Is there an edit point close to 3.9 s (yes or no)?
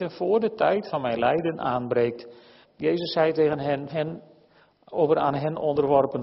yes